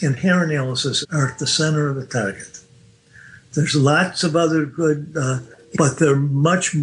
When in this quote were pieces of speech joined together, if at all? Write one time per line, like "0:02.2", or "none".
0:01.0
0:05.7

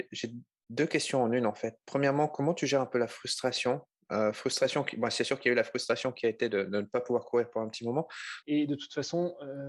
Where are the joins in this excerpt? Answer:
0:08.4

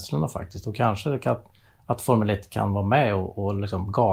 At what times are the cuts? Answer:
none

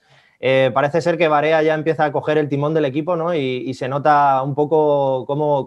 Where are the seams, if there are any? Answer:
none

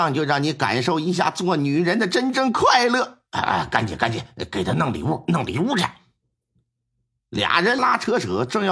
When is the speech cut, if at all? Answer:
0:07.8

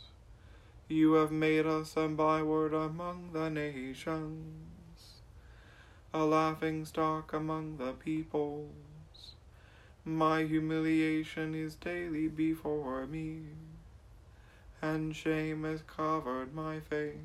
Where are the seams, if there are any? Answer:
none

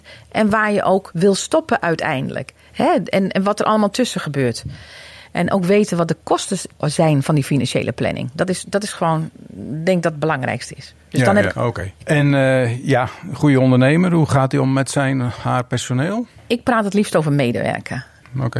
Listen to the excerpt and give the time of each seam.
0:03.9
0:11.5

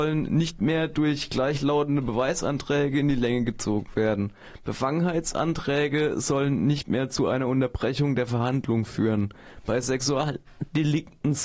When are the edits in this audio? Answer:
none

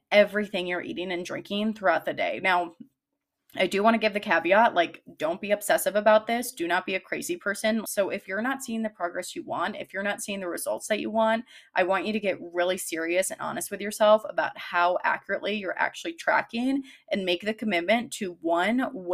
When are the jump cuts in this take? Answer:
0:07.8

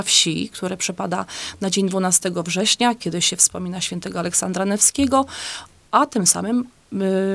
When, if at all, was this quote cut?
none

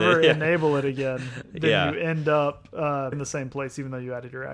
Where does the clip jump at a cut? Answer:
0:03.1

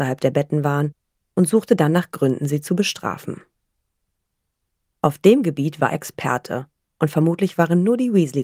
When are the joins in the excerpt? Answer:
0:04.8
0:05.9

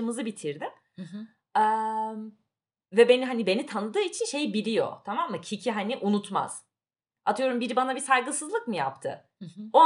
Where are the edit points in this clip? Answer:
none

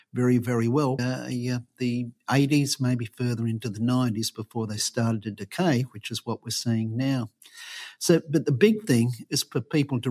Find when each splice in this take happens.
0:01.0

